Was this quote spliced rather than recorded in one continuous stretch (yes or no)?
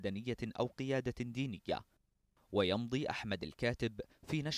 no